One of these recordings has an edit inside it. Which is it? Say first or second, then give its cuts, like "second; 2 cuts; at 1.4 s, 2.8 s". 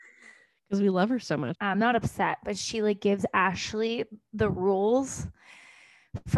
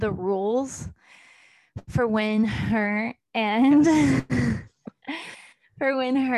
first; 1 cut; at 1.5 s